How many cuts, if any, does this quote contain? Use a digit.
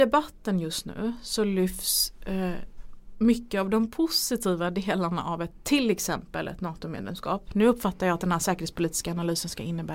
0